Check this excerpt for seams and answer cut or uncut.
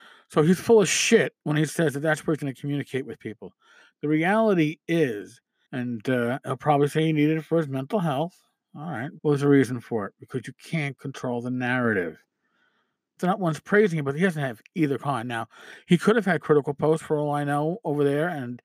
cut